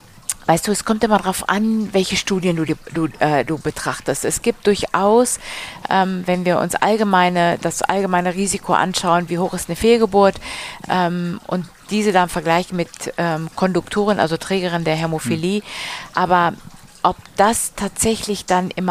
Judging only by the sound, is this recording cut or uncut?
cut